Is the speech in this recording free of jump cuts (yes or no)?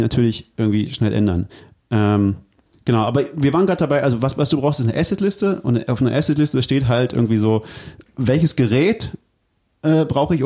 yes